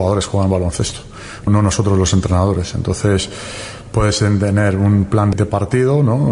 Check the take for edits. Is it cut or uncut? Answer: cut